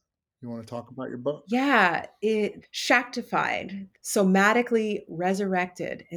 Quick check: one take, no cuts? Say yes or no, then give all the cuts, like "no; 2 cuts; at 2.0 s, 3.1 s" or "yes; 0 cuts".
no; 2 cuts; at 2.6 s, 3.9 s